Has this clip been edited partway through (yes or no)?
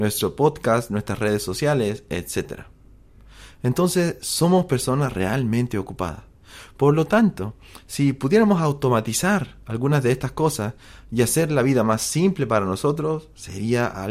no